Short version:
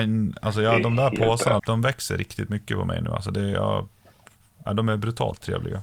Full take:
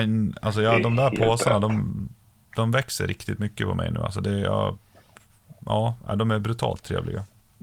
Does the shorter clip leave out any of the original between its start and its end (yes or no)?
yes